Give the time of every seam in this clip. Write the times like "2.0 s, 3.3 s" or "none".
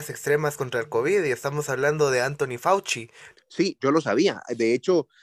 3.3 s